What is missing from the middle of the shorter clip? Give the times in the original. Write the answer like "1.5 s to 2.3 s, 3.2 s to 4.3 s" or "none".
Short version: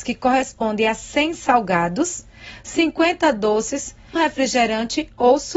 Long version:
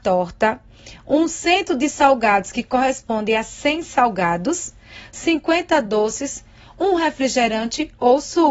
6.6 s to 7.0 s